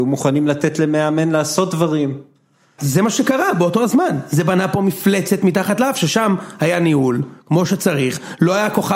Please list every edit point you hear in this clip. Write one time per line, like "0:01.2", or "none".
0:02.8